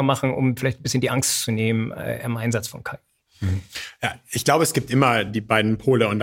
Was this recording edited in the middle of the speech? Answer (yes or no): no